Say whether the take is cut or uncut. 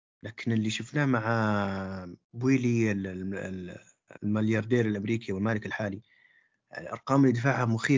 cut